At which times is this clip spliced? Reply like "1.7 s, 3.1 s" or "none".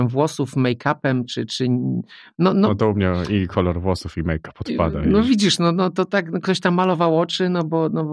none